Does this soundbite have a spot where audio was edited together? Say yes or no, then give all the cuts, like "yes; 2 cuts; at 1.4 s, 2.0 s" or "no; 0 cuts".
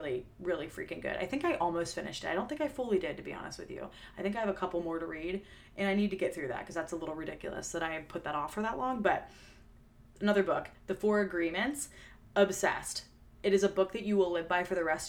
no; 0 cuts